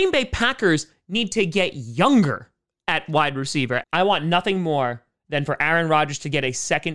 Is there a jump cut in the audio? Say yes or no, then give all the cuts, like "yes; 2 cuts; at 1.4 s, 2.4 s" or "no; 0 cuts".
yes; 1 cut; at 3.8 s